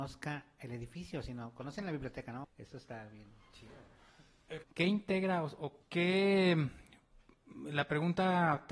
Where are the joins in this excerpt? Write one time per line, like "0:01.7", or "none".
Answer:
0:02.4
0:04.6
0:05.8